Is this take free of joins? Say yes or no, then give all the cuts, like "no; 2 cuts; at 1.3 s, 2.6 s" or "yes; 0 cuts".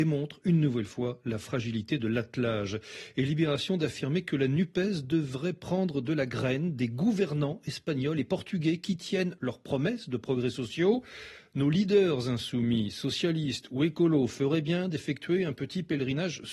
no; 1 cut; at 9.4 s